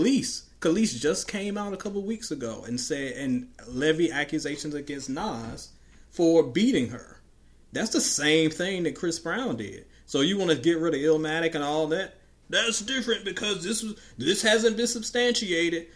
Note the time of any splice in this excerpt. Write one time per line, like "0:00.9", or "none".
0:12.4